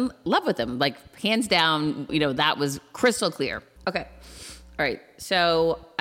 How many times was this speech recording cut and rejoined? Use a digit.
2